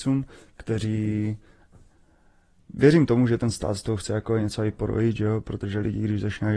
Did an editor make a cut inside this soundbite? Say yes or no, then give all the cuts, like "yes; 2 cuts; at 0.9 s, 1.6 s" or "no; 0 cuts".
no; 0 cuts